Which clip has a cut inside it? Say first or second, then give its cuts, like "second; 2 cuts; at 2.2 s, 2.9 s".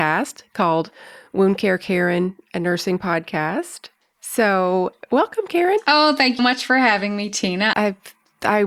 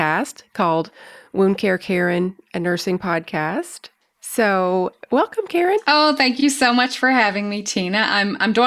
first; 2 cuts; at 6.4 s, 7.7 s